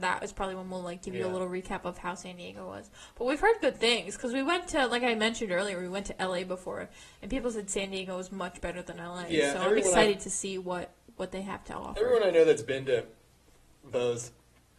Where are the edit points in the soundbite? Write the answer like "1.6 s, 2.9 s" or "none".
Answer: none